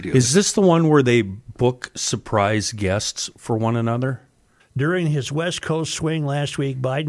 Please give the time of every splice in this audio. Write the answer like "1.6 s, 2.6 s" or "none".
4.6 s